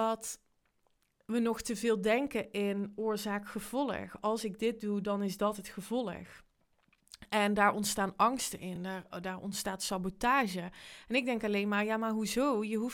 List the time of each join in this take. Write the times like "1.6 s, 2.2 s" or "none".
none